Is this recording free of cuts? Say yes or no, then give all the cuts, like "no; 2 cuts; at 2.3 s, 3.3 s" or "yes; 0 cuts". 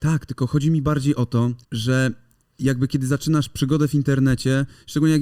no; 1 cut; at 1.6 s